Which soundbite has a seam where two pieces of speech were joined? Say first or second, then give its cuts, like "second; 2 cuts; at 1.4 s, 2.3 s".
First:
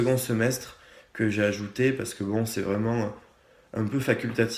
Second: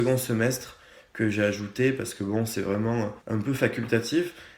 second; 1 cut; at 3.2 s